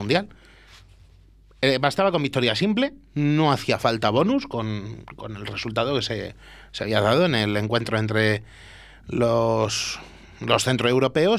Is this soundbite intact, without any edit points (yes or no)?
yes